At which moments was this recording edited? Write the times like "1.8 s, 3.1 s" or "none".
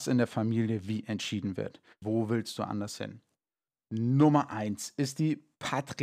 2.0 s